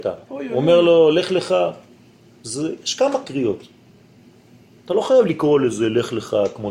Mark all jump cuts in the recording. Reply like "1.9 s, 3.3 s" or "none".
none